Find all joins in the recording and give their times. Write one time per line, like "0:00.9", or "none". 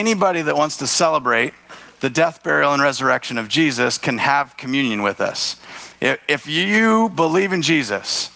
none